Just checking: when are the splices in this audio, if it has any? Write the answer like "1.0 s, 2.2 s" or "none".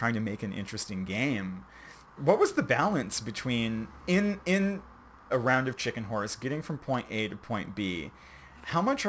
2.2 s, 5.3 s